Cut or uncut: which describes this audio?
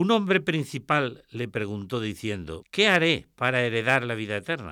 cut